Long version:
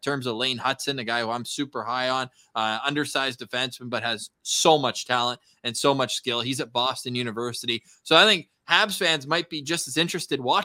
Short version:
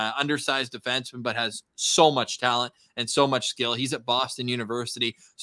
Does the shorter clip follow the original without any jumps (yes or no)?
yes